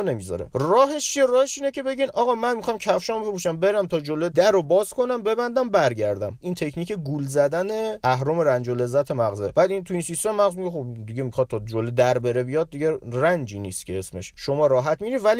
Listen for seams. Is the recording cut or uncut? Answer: cut